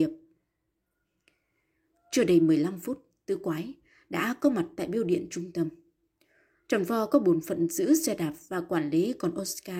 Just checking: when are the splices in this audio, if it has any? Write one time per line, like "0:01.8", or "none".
none

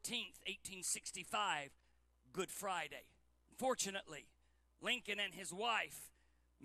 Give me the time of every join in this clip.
0:03.5

